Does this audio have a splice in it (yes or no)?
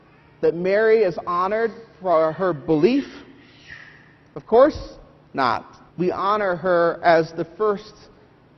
yes